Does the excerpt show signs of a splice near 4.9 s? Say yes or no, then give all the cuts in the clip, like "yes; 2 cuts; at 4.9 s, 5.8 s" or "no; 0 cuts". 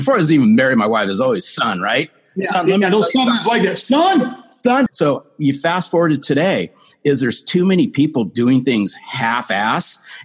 yes; 1 cut; at 4.9 s